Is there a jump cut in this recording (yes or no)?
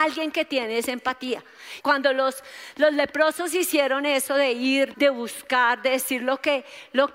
yes